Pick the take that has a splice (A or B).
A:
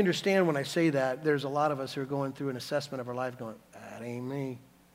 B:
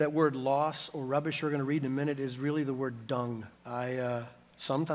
B